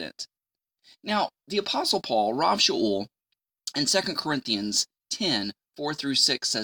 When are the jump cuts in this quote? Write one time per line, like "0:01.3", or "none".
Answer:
none